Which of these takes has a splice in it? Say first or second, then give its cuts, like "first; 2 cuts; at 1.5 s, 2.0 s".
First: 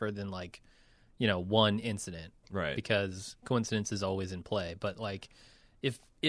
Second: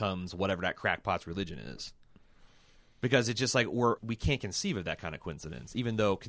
second; 1 cut; at 4.0 s